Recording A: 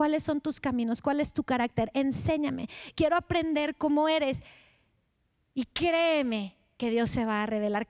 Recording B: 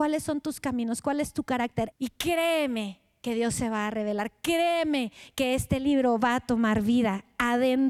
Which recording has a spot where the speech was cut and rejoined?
B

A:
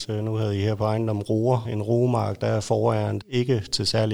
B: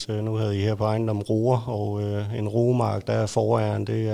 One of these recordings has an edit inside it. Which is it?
A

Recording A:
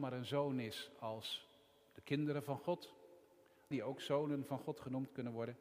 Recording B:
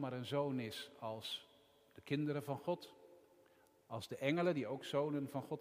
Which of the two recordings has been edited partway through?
A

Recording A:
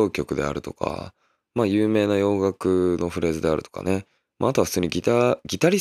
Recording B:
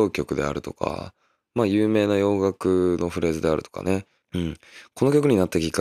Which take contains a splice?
B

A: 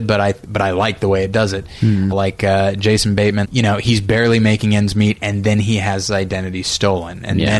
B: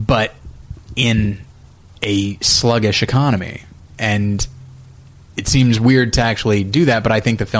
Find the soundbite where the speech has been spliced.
A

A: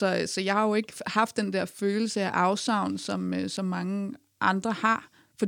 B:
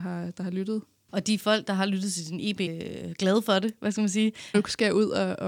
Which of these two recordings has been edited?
B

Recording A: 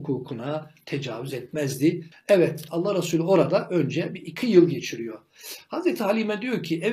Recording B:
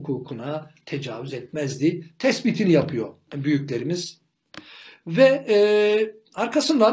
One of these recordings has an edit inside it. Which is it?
A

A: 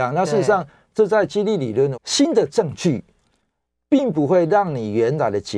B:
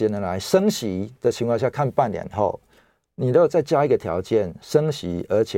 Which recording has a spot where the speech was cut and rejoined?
A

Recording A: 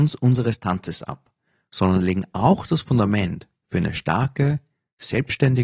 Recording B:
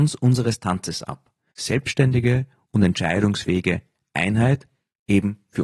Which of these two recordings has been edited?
B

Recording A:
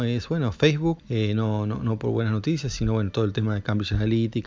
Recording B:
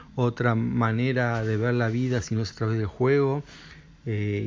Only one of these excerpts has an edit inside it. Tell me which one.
A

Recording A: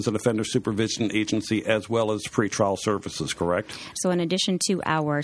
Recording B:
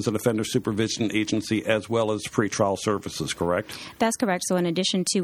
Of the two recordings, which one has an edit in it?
A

